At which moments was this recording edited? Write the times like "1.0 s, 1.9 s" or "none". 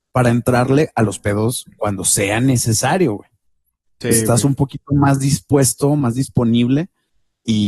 none